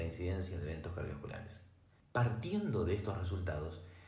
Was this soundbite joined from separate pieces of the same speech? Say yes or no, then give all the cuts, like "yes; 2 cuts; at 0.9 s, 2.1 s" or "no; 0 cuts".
yes; 1 cut; at 2.0 s